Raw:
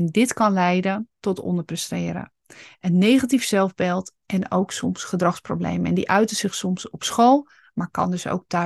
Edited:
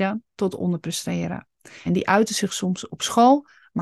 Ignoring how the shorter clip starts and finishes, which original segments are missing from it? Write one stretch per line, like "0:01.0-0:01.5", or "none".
0:02.7-0:05.9